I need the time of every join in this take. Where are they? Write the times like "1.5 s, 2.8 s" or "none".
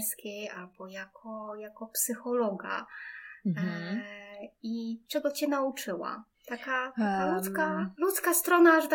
6.3 s